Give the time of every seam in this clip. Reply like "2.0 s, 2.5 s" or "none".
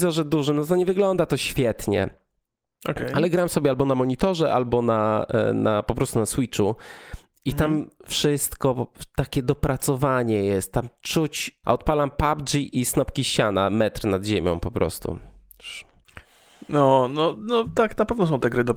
11.6 s